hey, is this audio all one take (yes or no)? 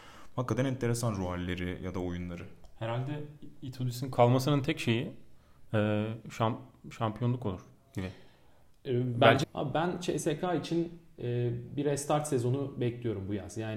no